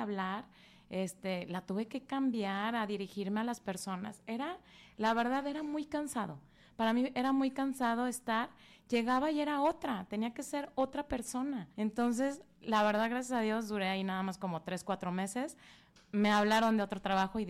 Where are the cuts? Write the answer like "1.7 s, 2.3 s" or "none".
11.7 s